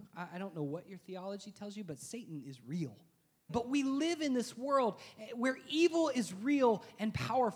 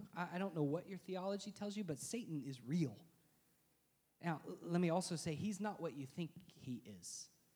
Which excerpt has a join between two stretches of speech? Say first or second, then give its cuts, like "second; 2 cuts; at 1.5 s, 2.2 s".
first; 1 cut; at 3.5 s